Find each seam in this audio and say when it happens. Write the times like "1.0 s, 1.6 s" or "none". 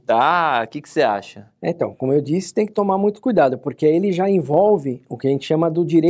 none